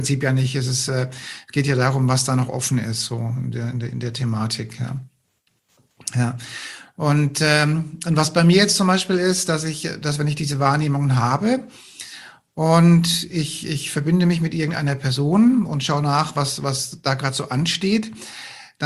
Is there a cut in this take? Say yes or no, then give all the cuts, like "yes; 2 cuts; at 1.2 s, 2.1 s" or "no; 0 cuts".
no; 0 cuts